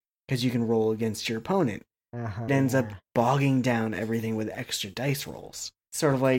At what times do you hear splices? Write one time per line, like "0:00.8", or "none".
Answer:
0:02.5